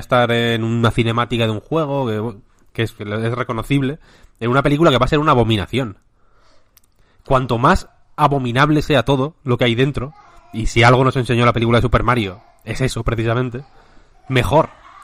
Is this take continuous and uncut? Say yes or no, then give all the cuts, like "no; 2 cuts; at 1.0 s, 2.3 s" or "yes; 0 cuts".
no; 1 cut; at 3.0 s